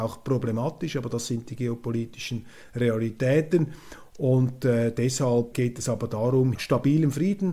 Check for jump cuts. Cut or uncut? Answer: cut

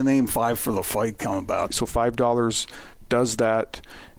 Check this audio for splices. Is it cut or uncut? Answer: cut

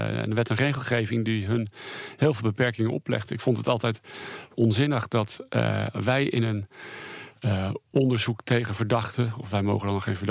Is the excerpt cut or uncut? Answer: uncut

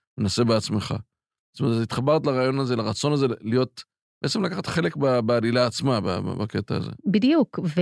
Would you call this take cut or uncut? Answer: uncut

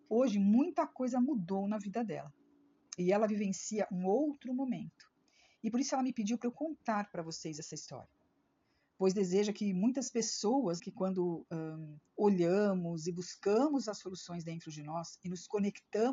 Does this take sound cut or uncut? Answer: cut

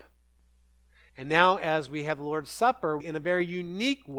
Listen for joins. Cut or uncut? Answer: cut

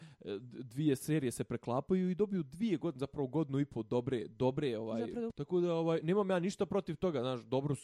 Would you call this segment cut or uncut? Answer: cut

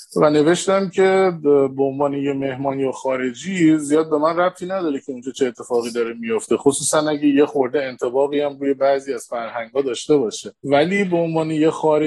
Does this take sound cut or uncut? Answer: cut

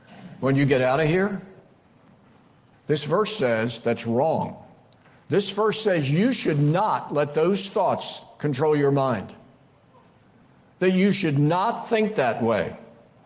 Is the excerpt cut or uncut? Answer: cut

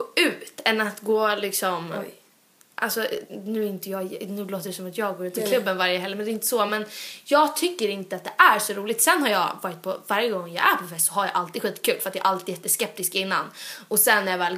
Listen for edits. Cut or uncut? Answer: uncut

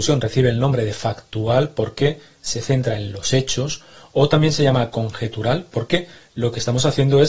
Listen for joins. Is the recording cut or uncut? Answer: uncut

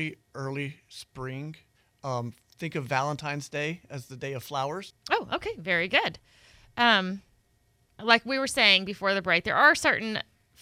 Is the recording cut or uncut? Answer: cut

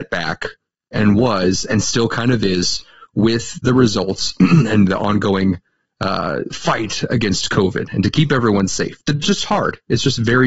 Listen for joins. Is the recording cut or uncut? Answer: uncut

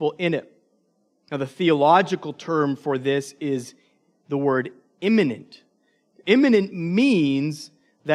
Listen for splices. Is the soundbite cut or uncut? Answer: cut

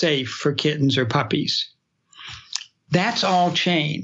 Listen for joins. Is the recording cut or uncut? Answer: uncut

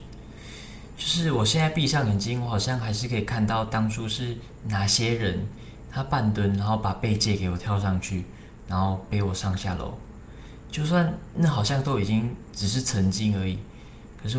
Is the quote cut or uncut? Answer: cut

